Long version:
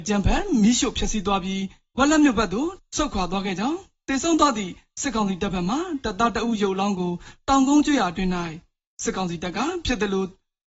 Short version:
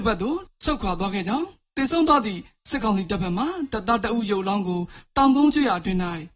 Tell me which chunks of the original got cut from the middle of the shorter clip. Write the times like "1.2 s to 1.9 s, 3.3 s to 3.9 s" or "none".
none